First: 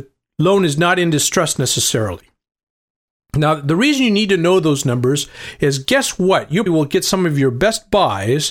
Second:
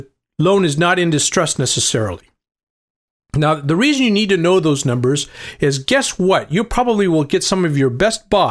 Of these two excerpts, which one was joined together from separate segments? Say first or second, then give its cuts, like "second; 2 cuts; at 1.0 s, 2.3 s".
first; 1 cut; at 6.7 s